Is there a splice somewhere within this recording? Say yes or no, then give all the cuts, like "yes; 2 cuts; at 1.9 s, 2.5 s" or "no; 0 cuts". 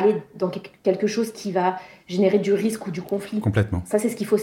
no; 0 cuts